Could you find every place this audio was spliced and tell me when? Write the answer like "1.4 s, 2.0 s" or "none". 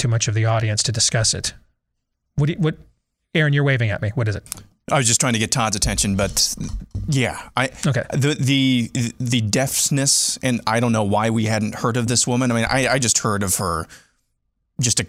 none